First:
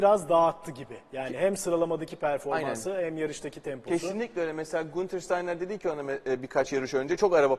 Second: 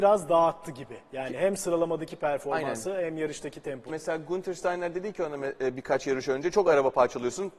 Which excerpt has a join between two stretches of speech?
second; 1 cut; at 3.9 s

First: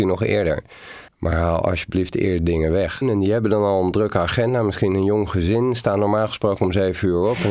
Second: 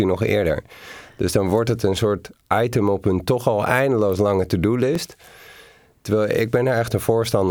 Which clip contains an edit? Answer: first; 2 cuts; at 1.1 s, 3.0 s

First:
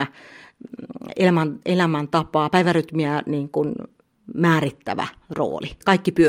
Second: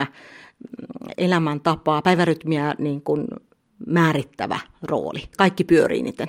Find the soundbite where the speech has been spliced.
second; 1 cut; at 1.1 s

